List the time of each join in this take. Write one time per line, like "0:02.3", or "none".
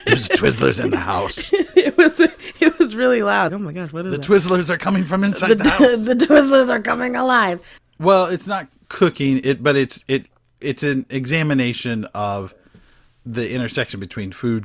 0:03.5
0:07.8